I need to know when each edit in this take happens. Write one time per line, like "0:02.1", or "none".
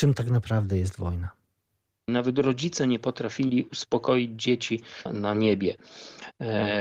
0:02.1
0:05.1